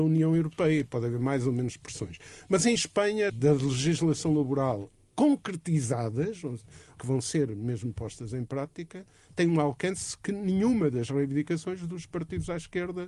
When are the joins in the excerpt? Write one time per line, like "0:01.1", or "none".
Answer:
0:03.3
0:07.0